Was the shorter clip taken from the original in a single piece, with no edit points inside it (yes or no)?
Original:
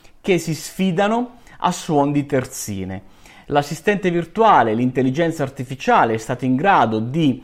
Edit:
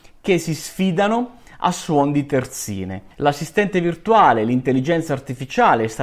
no